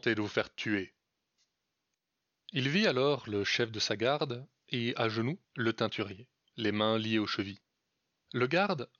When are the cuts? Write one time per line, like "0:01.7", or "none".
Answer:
0:05.4